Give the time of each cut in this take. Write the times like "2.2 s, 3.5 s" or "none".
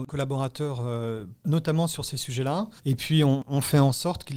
2.8 s